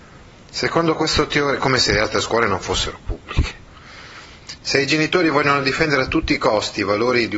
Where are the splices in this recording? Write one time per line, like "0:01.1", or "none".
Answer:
0:04.6